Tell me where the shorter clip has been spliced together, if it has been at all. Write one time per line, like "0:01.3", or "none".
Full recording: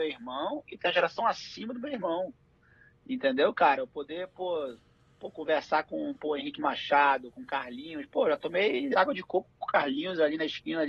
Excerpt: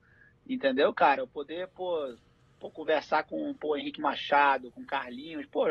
none